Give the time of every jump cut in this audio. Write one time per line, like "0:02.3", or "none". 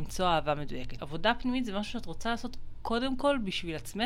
0:01.0